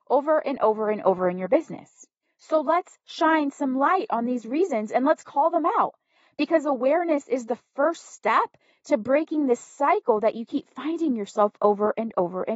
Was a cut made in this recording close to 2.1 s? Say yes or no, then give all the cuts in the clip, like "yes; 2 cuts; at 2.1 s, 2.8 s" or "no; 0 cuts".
no; 0 cuts